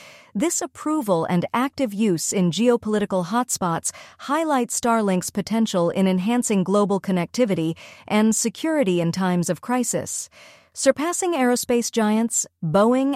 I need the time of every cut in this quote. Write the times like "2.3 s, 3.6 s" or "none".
none